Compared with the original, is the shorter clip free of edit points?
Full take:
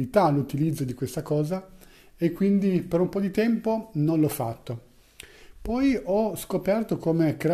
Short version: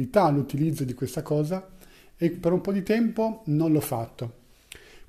no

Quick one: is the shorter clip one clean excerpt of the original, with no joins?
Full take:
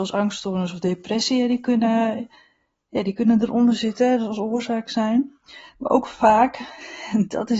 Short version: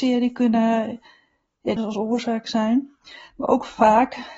no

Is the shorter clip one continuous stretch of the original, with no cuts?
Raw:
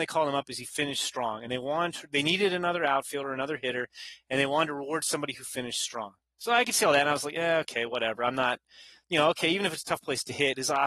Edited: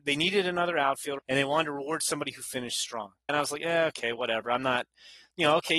no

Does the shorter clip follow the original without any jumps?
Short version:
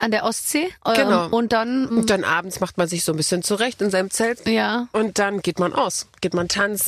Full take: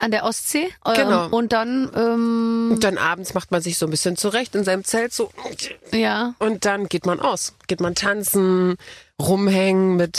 no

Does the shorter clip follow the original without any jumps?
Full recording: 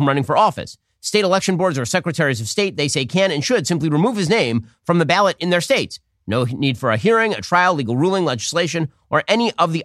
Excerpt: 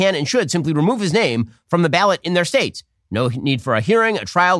yes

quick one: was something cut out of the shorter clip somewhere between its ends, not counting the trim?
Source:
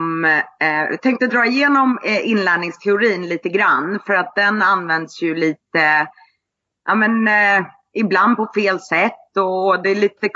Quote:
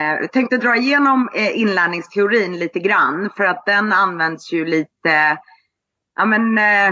no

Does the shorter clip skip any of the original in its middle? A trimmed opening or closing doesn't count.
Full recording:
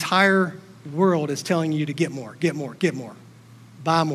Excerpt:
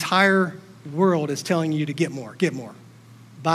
yes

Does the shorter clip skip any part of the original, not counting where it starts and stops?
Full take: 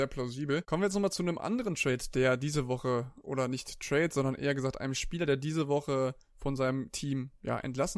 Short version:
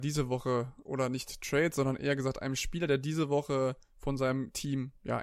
no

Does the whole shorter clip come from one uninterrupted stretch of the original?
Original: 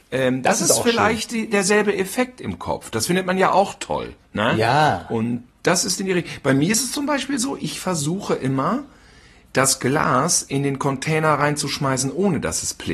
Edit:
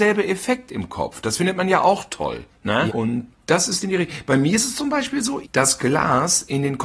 no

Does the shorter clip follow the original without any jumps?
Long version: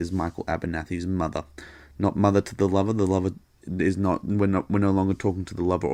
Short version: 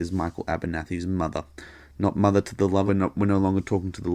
no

